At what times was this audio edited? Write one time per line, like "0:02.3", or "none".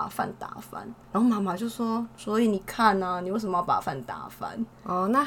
none